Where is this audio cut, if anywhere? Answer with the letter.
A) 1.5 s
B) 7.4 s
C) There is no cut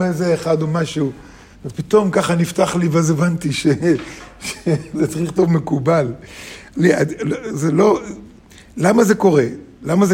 A